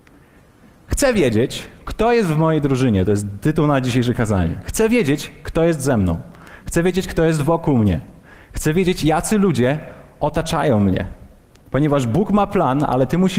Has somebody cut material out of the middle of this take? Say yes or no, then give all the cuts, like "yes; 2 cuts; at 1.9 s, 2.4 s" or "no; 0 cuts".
no; 0 cuts